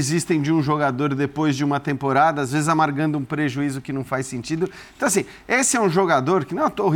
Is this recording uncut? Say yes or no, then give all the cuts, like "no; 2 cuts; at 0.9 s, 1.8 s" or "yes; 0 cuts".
yes; 0 cuts